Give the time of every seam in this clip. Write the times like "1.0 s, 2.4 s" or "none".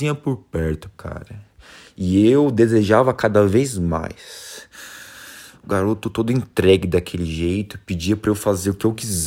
0.9 s

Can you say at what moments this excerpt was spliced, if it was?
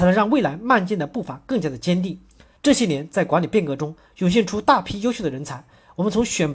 2.6 s

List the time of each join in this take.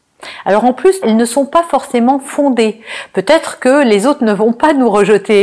1.0 s

